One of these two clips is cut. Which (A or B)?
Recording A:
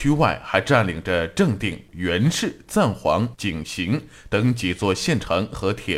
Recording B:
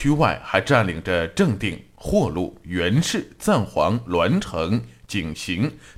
A